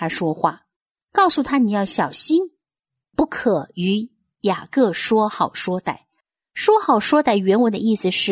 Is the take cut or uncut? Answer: uncut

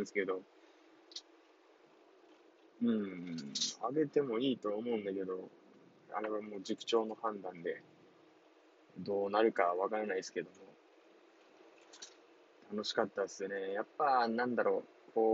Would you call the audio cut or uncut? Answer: uncut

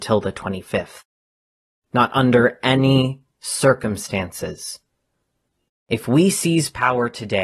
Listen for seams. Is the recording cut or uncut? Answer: cut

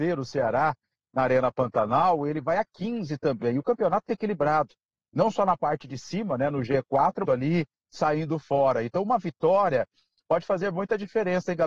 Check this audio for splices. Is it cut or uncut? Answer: cut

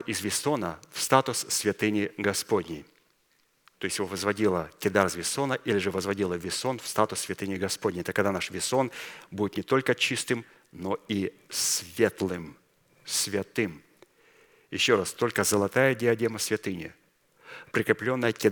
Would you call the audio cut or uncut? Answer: uncut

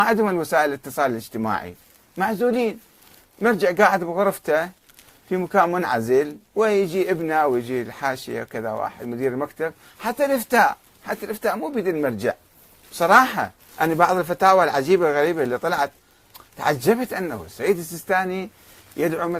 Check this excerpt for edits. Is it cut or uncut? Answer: uncut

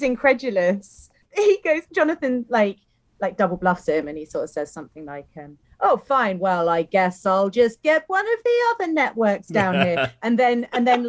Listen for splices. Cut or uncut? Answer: uncut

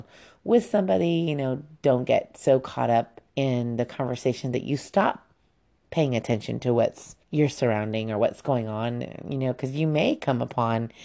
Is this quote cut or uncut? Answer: cut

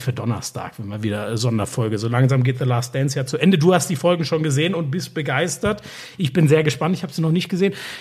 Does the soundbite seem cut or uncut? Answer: uncut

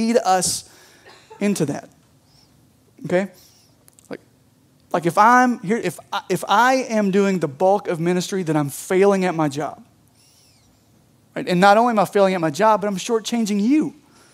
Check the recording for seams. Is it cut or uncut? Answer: cut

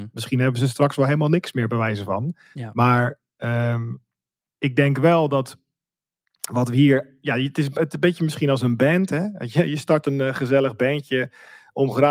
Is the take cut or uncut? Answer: uncut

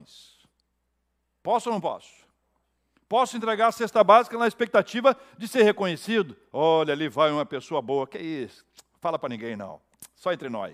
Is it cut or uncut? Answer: uncut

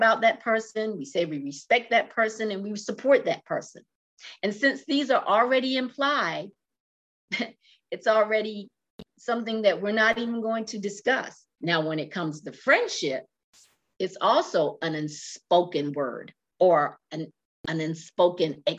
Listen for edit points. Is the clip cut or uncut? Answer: cut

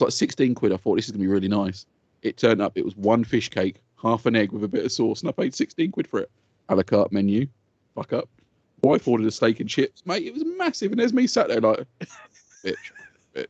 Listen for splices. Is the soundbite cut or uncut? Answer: uncut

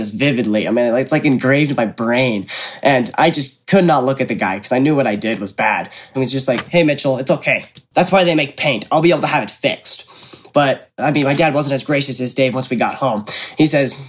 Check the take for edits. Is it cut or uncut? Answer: cut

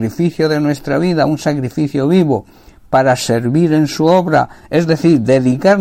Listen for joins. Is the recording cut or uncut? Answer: uncut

